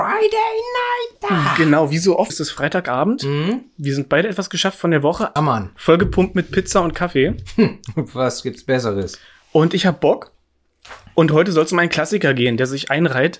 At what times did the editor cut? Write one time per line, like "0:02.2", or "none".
0:02.3
0:05.4